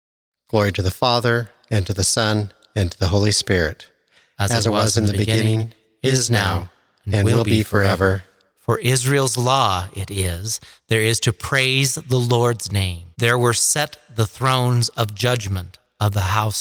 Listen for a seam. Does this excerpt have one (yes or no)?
yes